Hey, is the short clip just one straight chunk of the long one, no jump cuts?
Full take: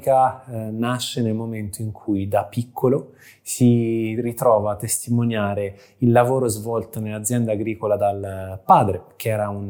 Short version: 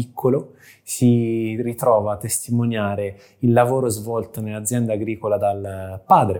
yes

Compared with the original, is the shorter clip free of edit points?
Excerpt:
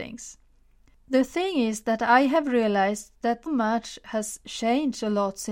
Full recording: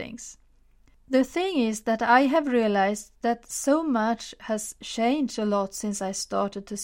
no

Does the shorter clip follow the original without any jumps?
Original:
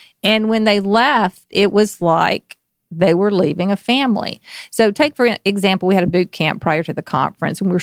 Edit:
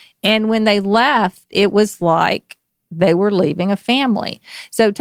yes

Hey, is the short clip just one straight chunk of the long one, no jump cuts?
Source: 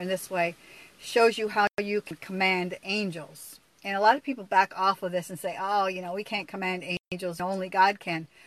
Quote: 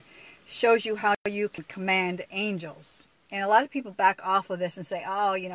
yes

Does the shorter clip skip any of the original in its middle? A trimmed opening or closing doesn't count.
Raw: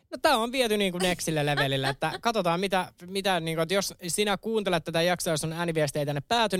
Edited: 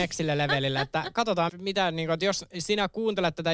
yes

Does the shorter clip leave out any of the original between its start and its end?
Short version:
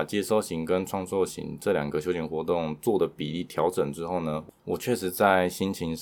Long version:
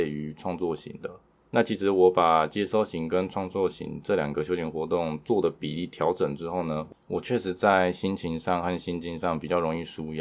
no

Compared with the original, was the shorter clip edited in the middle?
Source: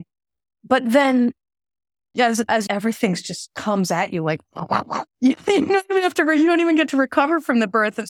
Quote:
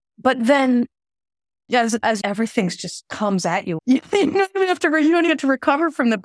yes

